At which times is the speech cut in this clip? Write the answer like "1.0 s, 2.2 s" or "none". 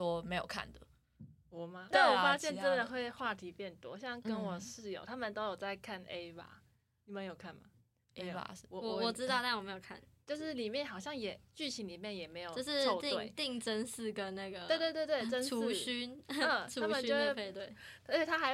1.9 s